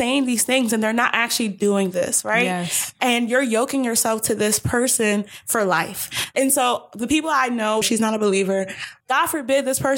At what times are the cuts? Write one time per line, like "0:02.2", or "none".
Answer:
0:06.3
0:07.8
0:09.0